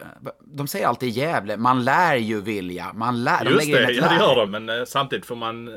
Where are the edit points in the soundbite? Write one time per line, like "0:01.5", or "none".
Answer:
0:04.5

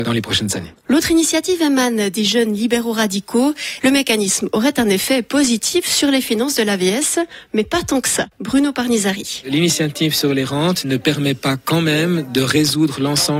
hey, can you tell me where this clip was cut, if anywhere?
0:03.8

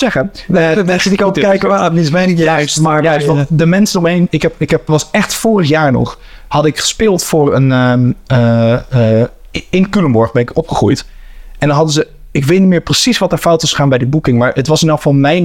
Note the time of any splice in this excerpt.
0:04.9

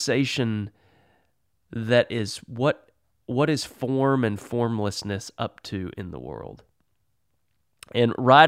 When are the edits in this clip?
none

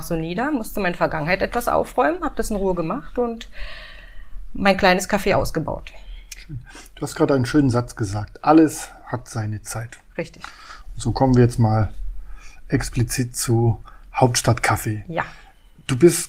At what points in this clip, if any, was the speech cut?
none

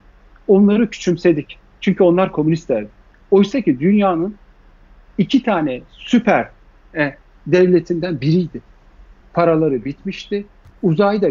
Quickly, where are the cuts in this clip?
0:07.3
0:09.2

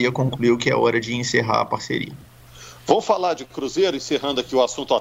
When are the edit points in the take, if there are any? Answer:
none

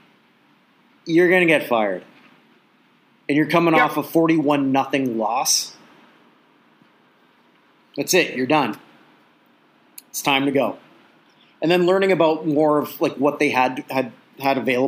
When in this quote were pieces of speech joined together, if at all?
none

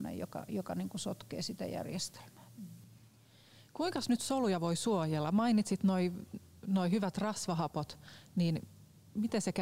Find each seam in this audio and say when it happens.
none

